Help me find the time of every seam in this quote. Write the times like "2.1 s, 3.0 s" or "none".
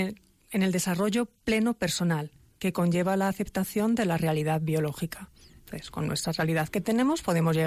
none

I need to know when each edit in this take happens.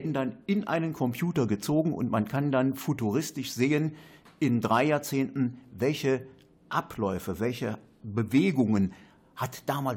none

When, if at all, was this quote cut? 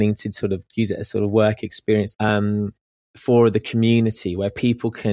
2.1 s

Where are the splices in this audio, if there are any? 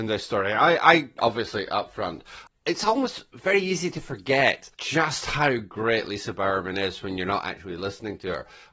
1.2 s, 2.5 s, 4.7 s

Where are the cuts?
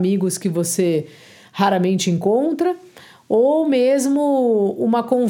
none

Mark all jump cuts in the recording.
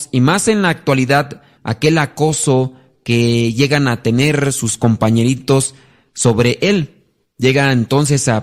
1.6 s

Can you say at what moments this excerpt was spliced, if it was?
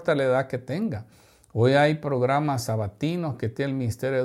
none

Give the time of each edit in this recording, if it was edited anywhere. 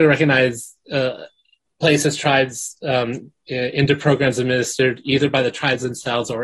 1.7 s

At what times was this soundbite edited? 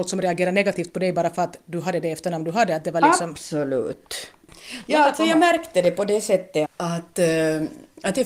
6.6 s

